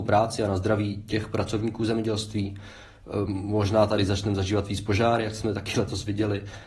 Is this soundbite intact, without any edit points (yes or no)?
yes